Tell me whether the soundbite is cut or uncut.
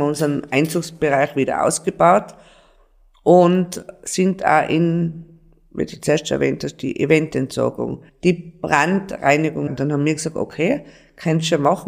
cut